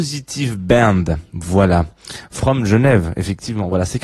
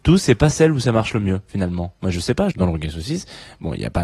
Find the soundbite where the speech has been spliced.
second; 1 cut; at 2.5 s

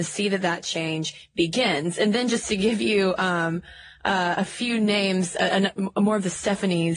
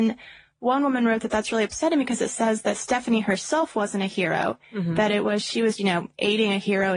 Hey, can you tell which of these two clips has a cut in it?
second; 1 cut; at 5.8 s

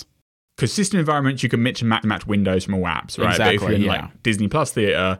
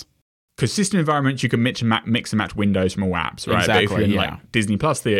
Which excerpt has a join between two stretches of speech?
first; 1 cut; at 2.0 s

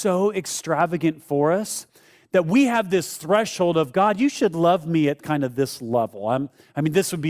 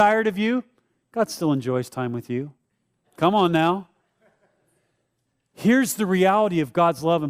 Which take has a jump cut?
second; 1 cut; at 3.0 s

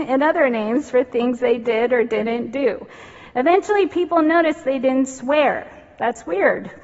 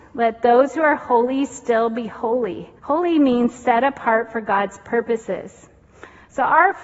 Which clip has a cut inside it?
second; 1 cut; at 2.8 s

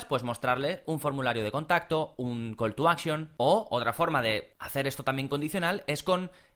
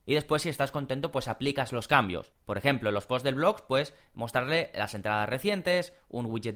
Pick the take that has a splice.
second; 1 cut; at 2.4 s

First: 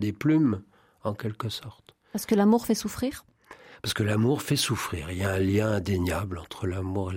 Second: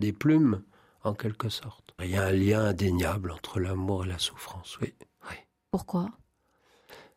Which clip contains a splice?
second; 1 cut; at 2.0 s

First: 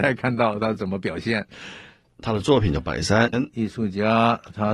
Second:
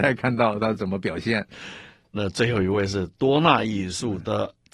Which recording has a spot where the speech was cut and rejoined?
first; 2 cuts; at 2.1 s, 3.3 s

